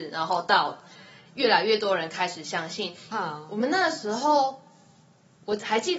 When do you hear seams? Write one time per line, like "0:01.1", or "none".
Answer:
0:03.1